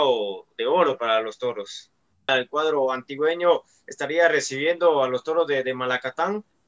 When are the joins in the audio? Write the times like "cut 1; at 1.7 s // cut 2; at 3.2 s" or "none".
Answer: cut 1; at 2.3 s